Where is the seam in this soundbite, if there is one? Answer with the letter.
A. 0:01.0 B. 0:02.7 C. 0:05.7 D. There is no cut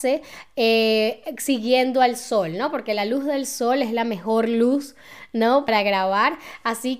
D